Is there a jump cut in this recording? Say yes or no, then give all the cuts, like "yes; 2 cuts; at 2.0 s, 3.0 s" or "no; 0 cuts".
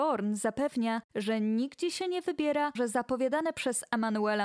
yes; 1 cut; at 2.8 s